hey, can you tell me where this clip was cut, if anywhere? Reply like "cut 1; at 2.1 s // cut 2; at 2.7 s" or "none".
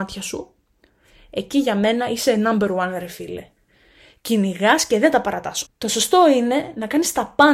cut 1; at 5.7 s